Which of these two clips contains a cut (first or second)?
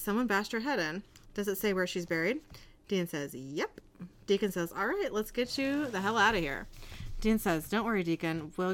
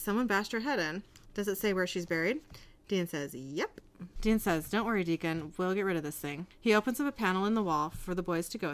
second